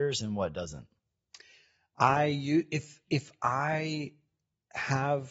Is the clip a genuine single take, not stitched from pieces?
yes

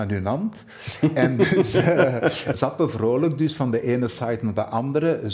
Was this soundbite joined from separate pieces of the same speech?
yes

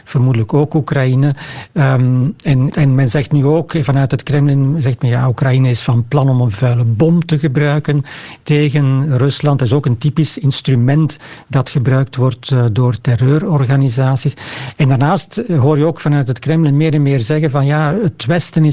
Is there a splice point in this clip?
yes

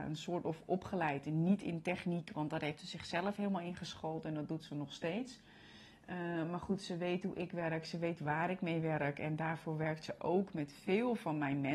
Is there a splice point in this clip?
no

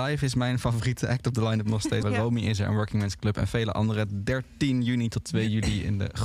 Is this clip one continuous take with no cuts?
no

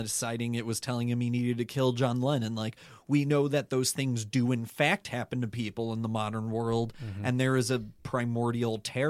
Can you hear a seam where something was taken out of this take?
no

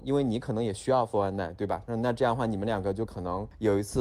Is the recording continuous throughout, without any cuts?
no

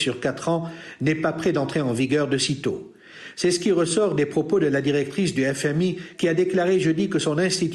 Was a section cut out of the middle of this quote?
yes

